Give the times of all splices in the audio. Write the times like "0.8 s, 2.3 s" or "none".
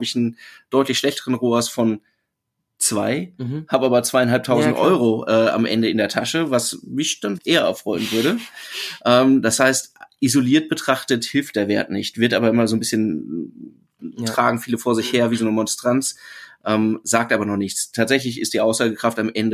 7.4 s